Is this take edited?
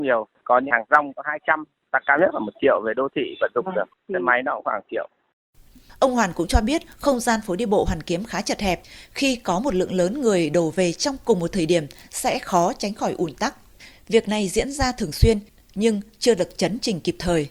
yes; 1 cut; at 13.9 s

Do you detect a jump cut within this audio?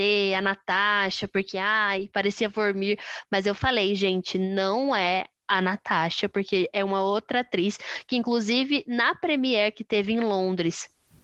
no; 0 cuts

